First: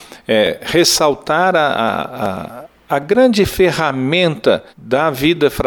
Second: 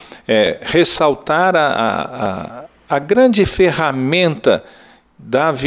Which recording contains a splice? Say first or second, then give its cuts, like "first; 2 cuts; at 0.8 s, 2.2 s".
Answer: first; 1 cut; at 4.7 s